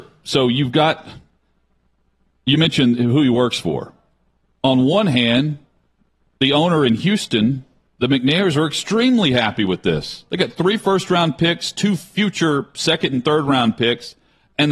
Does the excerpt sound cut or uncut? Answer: uncut